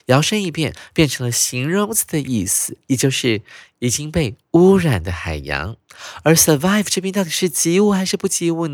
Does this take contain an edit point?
no; 0 cuts

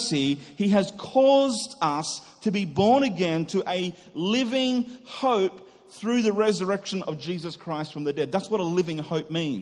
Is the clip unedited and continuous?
yes; 0 cuts

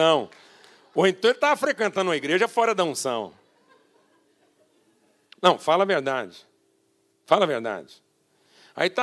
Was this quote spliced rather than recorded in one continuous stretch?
no; 0 cuts

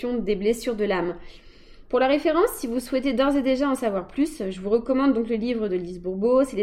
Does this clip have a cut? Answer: no; 0 cuts

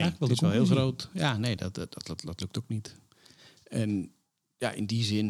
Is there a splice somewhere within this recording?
no; 0 cuts

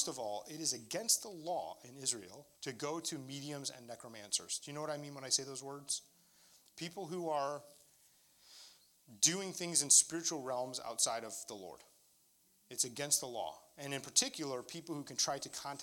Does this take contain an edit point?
yes; 1 cut; at 2.5 s

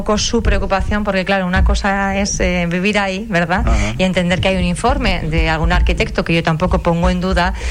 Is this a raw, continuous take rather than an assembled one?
yes; 0 cuts

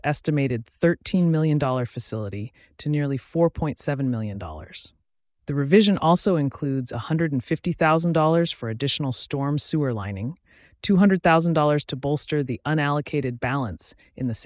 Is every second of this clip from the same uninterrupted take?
yes; 0 cuts

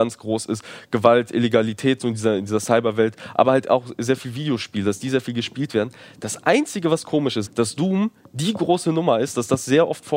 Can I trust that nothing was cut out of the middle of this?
no; 1 cut; at 7.5 s

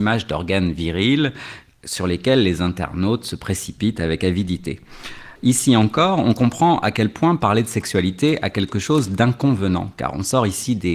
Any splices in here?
yes; 1 cut; at 5.4 s

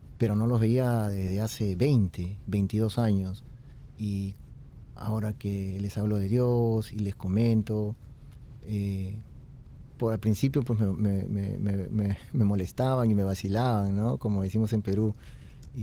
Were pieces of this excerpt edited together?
yes; 1 cut; at 6.9 s

